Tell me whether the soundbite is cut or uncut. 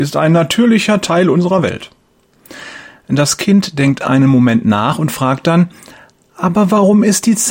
uncut